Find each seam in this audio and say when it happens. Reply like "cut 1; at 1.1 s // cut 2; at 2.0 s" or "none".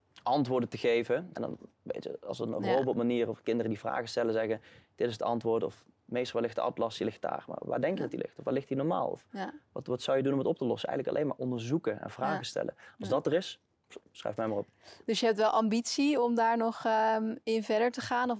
cut 1; at 1.3 s